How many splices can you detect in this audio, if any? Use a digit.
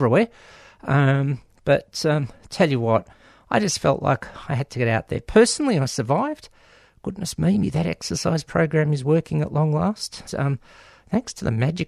2